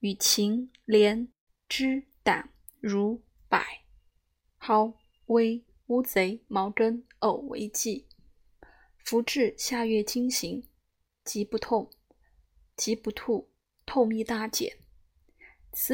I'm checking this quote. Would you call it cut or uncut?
uncut